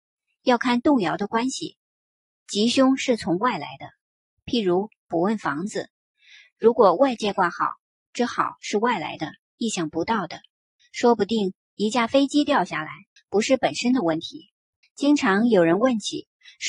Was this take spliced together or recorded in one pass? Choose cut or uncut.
cut